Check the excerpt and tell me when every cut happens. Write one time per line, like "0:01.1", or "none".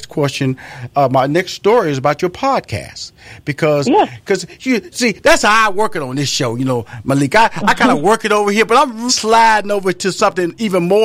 0:09.1